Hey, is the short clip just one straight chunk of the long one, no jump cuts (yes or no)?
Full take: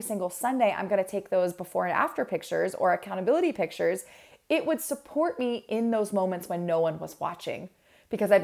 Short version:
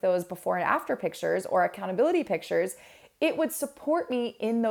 yes